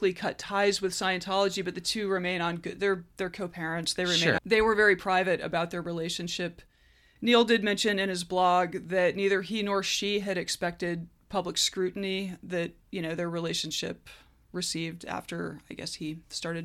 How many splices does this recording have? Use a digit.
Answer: 1